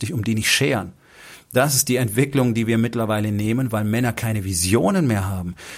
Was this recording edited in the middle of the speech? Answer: no; 0 cuts

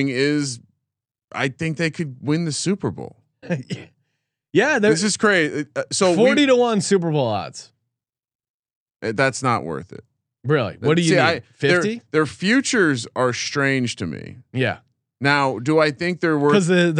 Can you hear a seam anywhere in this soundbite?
no; 0 cuts

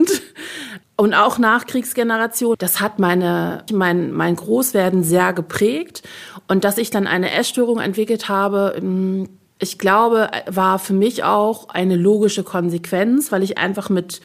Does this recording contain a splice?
yes; 2 cuts; at 2.5 s, 3.7 s

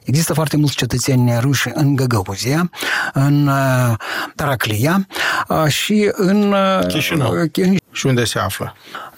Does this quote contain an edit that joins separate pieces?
yes; 1 cut; at 7.8 s

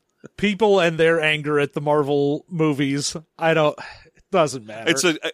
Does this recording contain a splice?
no; 0 cuts

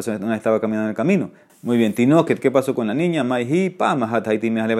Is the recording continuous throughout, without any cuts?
no; 1 cut; at 1.5 s

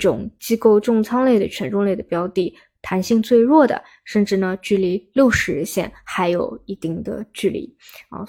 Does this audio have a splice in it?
no; 0 cuts

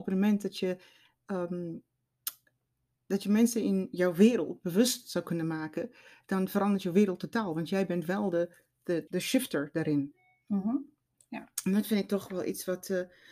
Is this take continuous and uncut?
no; 1 cut; at 9.1 s

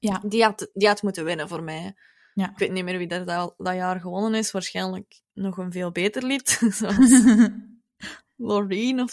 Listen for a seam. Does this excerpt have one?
no; 0 cuts

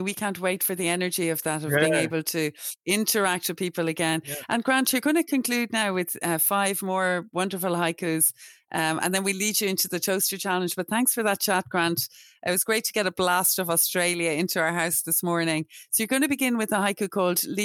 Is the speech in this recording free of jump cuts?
yes; 0 cuts

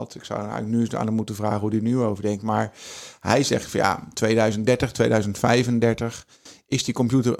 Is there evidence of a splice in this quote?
no; 0 cuts

